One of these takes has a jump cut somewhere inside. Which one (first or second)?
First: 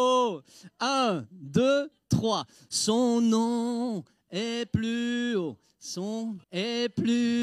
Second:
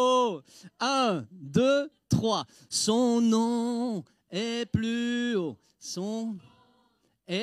first